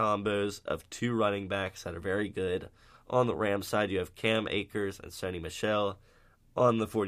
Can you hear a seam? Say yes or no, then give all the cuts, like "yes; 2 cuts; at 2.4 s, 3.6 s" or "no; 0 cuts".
no; 0 cuts